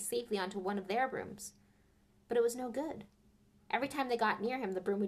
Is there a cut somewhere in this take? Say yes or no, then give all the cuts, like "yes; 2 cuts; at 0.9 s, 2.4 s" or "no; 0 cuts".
no; 0 cuts